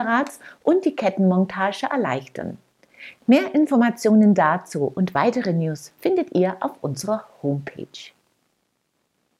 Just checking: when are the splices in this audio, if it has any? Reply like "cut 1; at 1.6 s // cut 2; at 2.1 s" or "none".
cut 1; at 3.2 s